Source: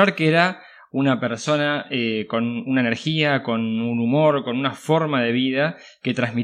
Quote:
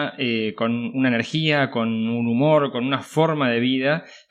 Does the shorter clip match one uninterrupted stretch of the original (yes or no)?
yes